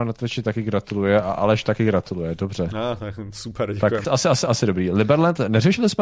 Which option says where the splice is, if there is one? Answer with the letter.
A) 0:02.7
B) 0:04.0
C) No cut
B